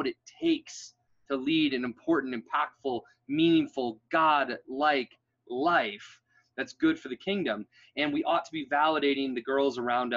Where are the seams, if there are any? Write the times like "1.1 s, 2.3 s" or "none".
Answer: none